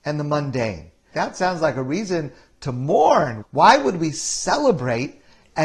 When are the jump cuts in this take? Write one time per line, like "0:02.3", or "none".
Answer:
0:01.1
0:03.4

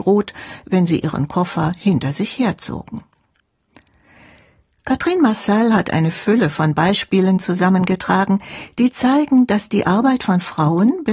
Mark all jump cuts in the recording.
none

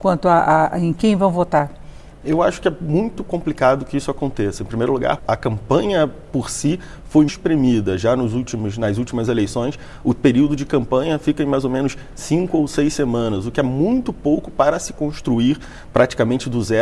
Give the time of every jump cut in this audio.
0:05.2
0:07.3

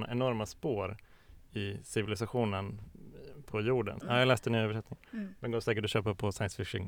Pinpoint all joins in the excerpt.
0:04.0

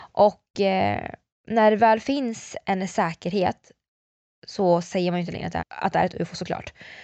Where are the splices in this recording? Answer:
0:05.6

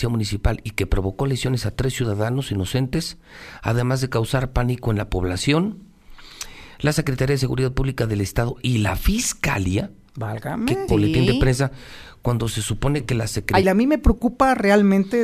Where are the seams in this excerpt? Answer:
0:10.9
0:13.6

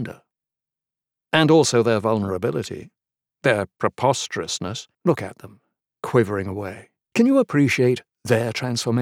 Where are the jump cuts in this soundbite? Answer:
0:04.9
0:07.1

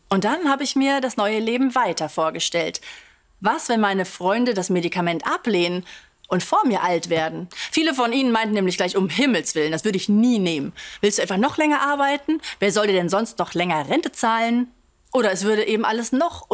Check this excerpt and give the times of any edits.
none

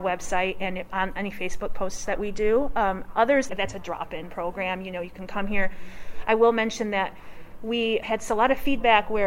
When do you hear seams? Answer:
0:03.5
0:08.0

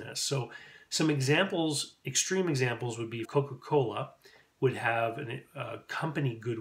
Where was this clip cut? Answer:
0:03.2

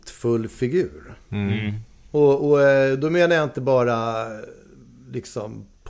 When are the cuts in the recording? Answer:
none

